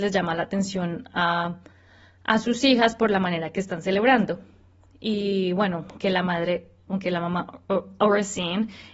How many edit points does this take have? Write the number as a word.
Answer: zero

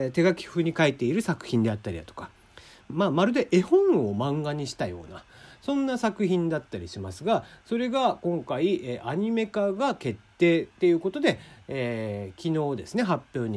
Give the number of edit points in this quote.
one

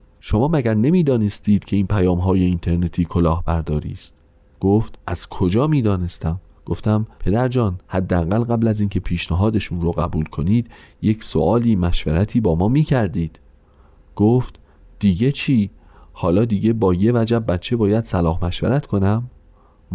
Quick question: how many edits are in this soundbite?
zero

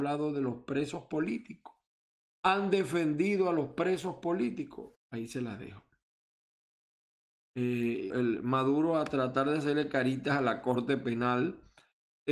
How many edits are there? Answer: three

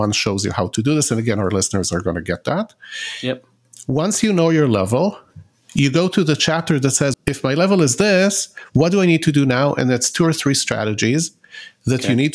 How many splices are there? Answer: one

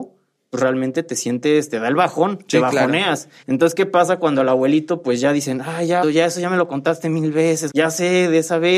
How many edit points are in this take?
three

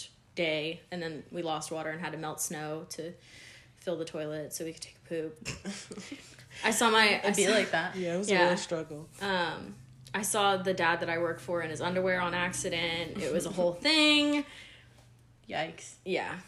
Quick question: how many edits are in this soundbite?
zero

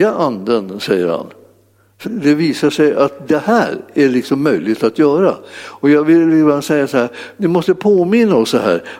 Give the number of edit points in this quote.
one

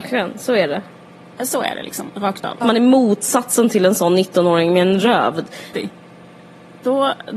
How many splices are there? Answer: two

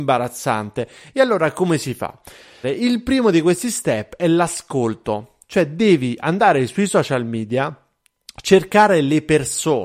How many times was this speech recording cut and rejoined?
one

